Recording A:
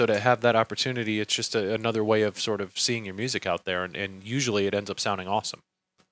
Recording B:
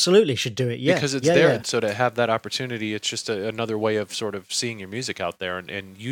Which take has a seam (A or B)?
B